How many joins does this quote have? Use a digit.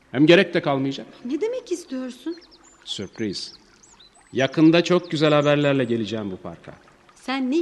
0